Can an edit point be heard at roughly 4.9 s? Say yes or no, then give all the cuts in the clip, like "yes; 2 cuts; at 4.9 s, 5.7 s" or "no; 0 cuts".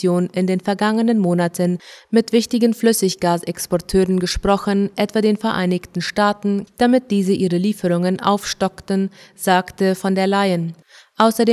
no; 1 cut; at 6.7 s